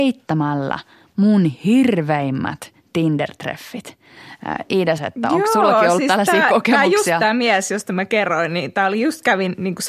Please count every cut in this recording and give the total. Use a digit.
1